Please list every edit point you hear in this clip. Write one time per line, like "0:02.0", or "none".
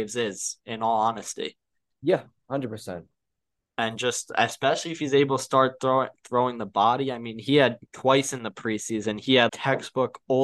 0:07.9
0:09.5